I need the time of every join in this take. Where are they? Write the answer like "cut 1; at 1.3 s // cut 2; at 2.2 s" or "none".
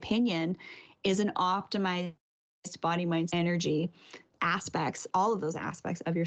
cut 1; at 3.3 s